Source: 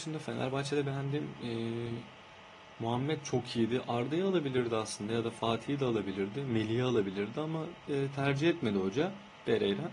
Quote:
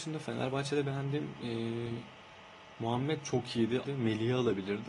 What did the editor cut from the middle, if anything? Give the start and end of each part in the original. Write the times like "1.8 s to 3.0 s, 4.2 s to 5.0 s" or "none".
3.9 s to 6.3 s